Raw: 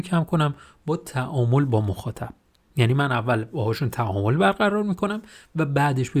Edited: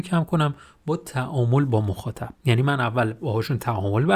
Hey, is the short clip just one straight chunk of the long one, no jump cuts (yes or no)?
no